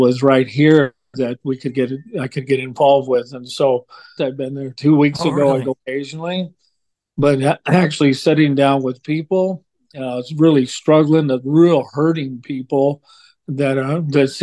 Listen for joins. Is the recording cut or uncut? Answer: cut